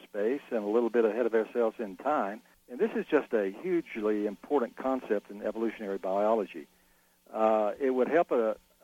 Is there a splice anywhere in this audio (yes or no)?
yes